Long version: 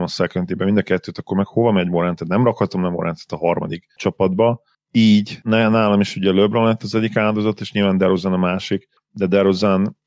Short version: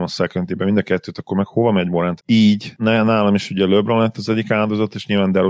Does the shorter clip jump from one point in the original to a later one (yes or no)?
yes